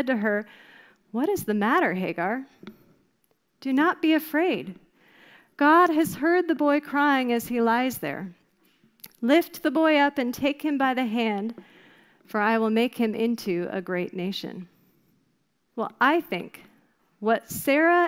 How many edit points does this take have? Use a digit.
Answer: 1